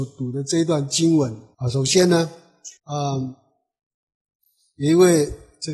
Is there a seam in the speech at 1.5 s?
yes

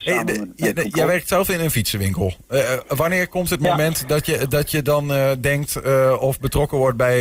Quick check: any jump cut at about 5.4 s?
no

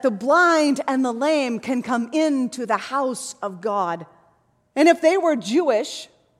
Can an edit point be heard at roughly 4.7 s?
yes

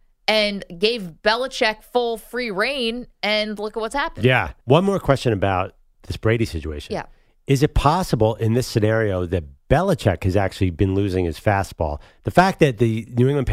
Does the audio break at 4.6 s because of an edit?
yes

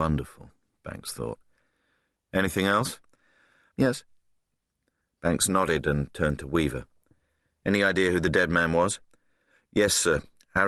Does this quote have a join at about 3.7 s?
yes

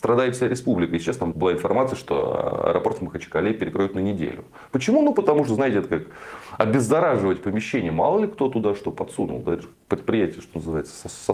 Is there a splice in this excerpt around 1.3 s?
yes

